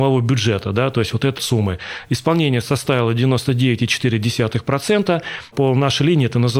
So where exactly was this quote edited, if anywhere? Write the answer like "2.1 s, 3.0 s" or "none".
1.4 s, 5.5 s

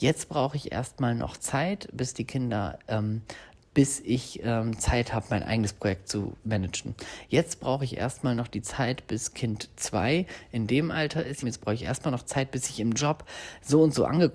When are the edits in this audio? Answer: 3.7 s, 11.4 s

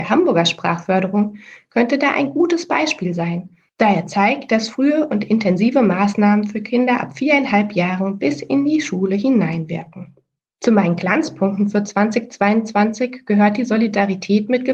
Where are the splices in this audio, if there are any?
none

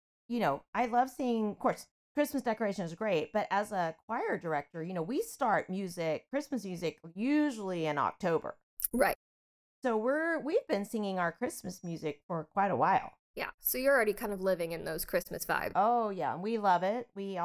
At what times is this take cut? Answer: none

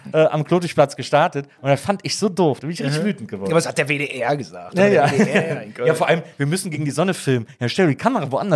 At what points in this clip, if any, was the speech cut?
2.6 s

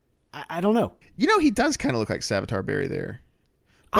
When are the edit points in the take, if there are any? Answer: 1.0 s

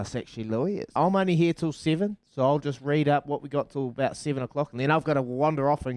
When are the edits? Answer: 1.0 s

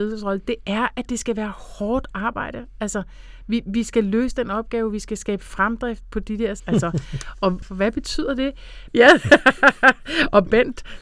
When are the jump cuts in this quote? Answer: 6.6 s, 7.6 s, 8.9 s

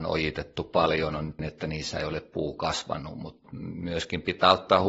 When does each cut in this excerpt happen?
1.4 s

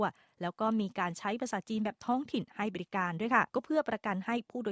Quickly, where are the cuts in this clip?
3.5 s

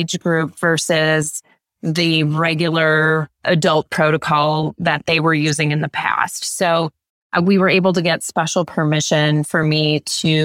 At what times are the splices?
none

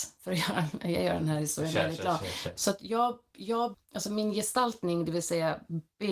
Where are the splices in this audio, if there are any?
2.6 s, 3.7 s

